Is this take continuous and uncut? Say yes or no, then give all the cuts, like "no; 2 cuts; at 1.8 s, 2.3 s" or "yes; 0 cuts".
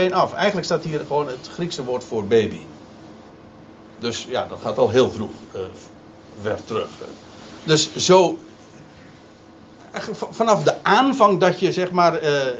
yes; 0 cuts